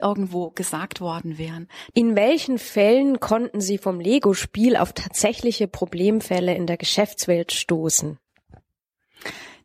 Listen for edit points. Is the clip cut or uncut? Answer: cut